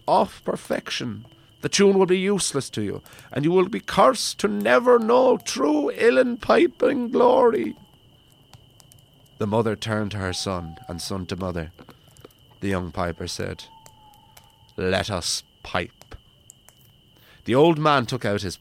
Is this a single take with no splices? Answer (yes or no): yes